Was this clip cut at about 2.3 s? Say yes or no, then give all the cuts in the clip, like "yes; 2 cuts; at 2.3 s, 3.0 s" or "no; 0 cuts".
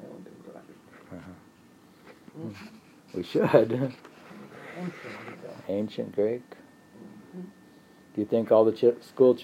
yes; 1 cut; at 2.3 s